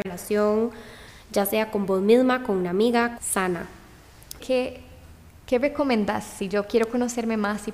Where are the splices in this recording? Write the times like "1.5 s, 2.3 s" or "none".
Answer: 3.2 s, 4.4 s